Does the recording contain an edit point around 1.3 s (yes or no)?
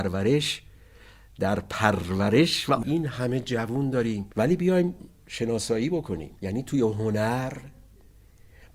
no